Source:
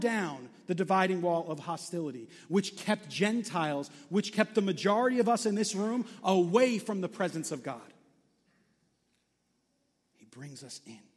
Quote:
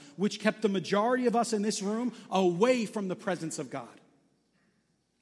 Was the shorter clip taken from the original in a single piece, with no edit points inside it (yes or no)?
yes